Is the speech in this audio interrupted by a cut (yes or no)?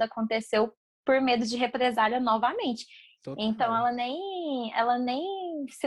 yes